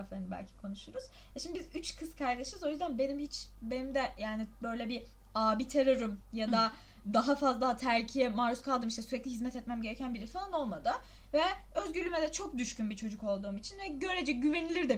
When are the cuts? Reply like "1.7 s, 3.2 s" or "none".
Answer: none